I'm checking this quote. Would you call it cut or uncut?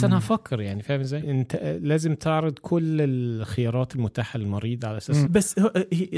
cut